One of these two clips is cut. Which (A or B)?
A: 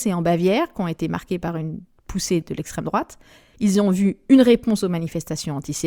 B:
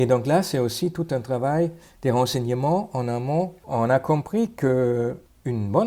A